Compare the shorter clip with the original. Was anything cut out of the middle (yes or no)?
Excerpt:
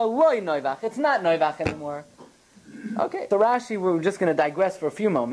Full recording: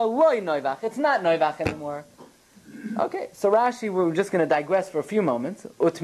yes